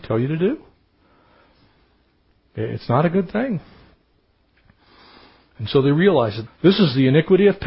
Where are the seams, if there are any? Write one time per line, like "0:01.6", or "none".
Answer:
0:06.5